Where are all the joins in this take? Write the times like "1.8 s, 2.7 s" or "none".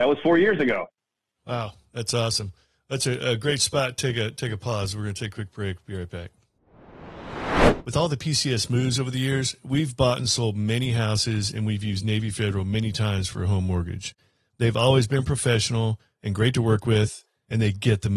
none